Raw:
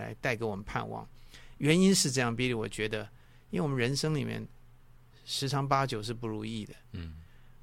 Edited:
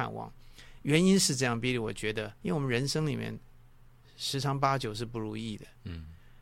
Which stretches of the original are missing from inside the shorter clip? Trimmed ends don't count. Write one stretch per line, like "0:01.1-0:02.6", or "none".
0:03.1-0:03.4